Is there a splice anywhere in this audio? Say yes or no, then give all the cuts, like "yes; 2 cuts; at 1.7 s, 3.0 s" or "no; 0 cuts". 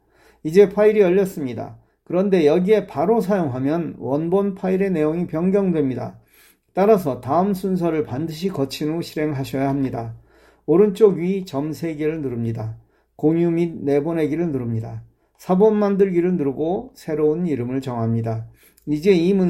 no; 0 cuts